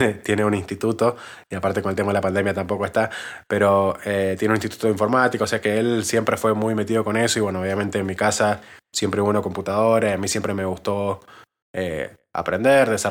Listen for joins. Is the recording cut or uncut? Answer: uncut